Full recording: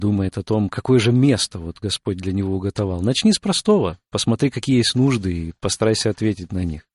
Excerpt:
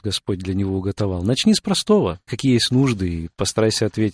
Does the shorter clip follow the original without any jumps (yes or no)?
no